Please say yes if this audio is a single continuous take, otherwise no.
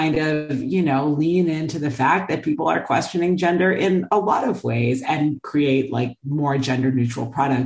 no